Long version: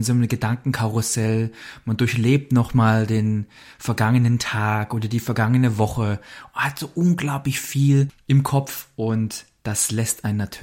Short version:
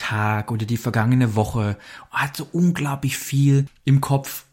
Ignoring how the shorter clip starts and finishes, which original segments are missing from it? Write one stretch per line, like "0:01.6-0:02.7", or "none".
none